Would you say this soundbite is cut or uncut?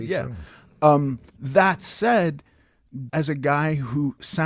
cut